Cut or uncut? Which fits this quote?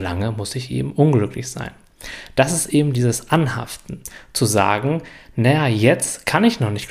uncut